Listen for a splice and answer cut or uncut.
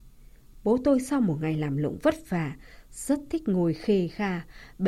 uncut